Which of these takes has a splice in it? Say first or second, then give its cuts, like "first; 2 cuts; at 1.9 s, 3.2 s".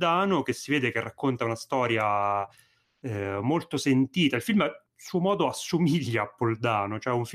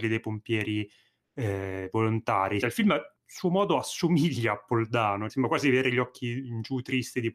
second; 2 cuts; at 2.6 s, 5.3 s